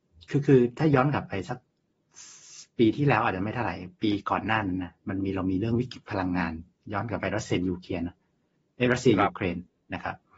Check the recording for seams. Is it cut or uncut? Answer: uncut